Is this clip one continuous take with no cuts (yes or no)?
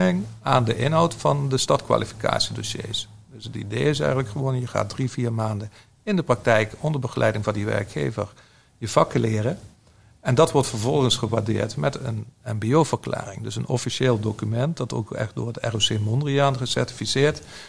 yes